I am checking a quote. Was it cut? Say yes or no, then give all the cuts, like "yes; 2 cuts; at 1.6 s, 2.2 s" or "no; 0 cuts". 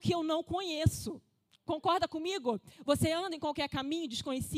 no; 0 cuts